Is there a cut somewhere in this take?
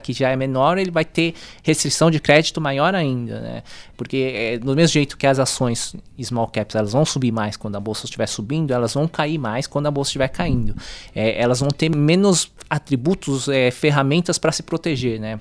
yes; 1 cut; at 3.9 s

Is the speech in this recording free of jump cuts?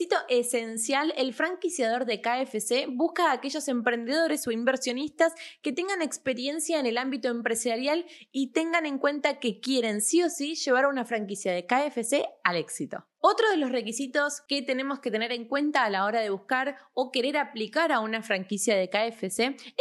yes; 0 cuts

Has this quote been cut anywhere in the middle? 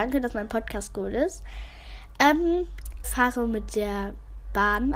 yes; 1 cut; at 3.0 s

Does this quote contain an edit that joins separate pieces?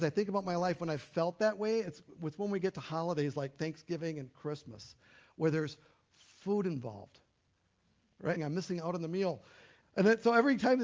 yes; 2 cuts; at 8.4 s, 9.8 s

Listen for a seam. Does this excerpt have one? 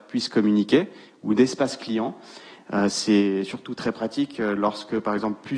no; 0 cuts

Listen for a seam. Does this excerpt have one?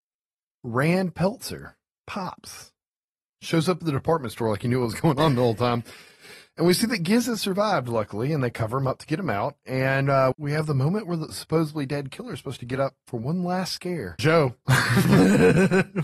yes; 2 cuts; at 10.3 s, 14.2 s

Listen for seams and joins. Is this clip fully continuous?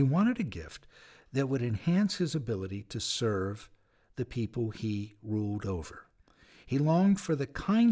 yes; 0 cuts

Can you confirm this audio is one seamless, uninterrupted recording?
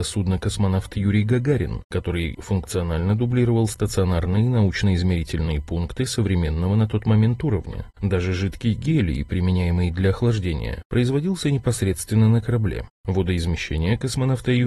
yes; 0 cuts

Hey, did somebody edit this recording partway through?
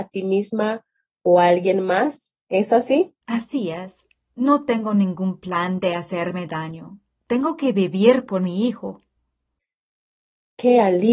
yes; 1 cut; at 3.2 s

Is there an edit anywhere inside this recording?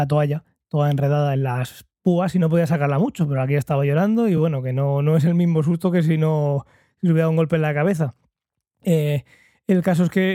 no; 0 cuts

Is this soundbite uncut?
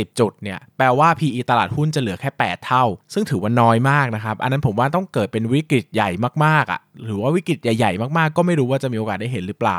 yes; 0 cuts

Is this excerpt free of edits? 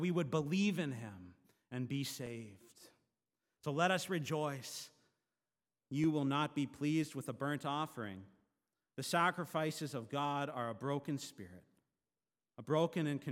no; 1 cut; at 5.8 s

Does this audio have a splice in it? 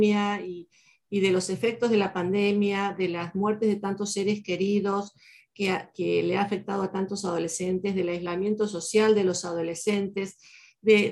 no; 0 cuts

